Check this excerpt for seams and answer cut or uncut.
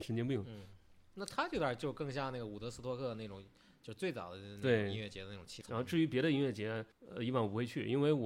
cut